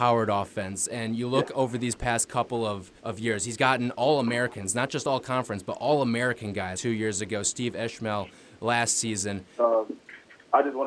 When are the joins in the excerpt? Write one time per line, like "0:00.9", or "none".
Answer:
0:03.0
0:06.7
0:09.6